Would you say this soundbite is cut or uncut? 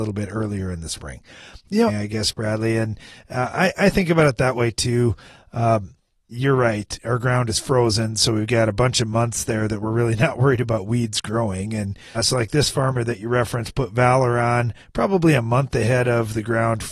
cut